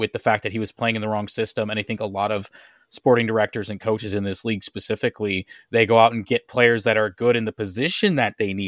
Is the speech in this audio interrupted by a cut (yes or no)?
no